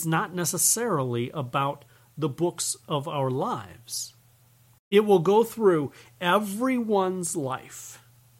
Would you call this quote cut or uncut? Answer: cut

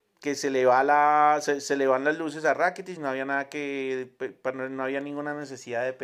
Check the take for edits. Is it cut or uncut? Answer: uncut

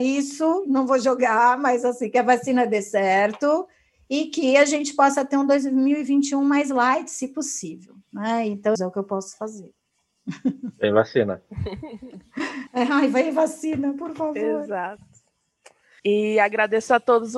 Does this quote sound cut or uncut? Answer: cut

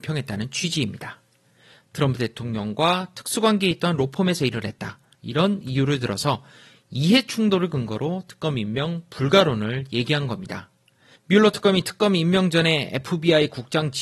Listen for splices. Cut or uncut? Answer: cut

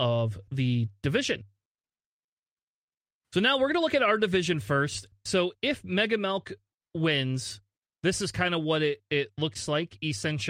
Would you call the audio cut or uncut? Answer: cut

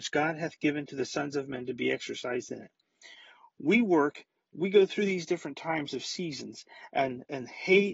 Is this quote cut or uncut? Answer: uncut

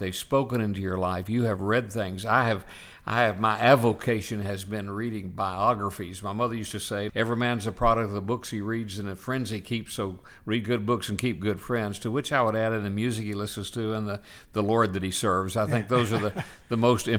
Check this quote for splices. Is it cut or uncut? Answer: cut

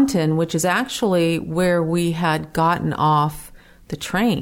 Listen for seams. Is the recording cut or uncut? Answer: uncut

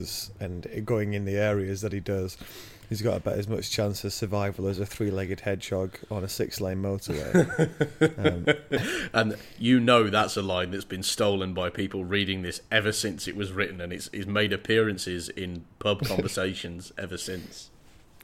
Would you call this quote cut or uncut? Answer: uncut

